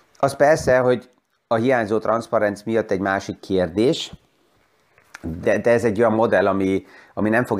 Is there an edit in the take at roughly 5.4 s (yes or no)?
yes